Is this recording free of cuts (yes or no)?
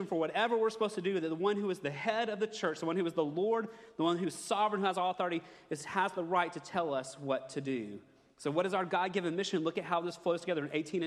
yes